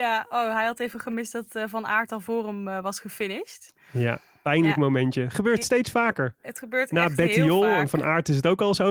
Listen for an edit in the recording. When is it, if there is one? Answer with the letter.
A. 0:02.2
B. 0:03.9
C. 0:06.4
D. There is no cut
D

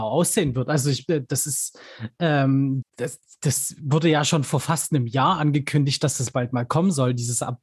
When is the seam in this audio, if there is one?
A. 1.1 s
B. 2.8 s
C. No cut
B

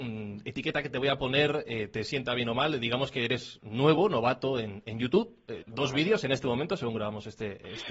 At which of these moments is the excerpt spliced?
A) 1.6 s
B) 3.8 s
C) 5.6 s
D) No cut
C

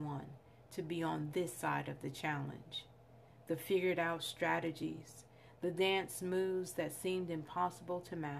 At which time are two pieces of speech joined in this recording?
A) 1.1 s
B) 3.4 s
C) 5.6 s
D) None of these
C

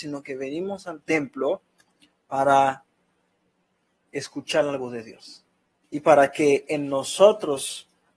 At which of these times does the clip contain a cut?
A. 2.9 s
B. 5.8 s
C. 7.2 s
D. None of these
B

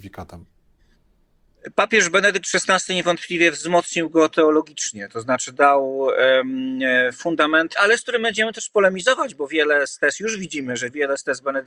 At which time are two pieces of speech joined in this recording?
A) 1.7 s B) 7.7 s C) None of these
B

